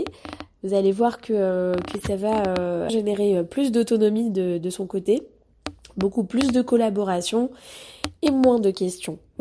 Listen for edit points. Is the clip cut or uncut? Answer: cut